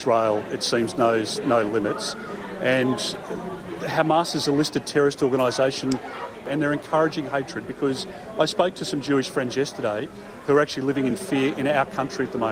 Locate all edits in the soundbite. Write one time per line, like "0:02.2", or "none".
none